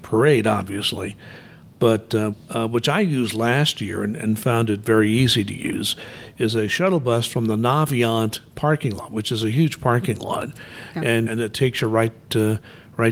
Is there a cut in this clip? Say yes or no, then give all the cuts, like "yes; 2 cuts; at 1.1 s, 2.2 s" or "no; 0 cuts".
yes; 2 cuts; at 2.3 s, 11.3 s